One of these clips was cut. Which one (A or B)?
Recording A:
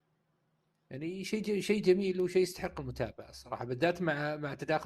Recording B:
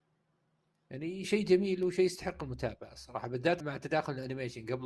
B